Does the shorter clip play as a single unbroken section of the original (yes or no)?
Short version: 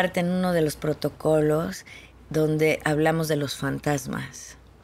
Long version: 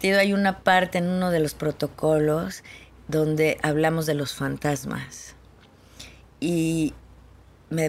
yes